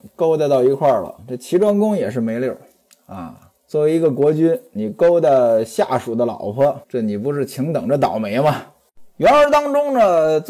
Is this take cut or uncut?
cut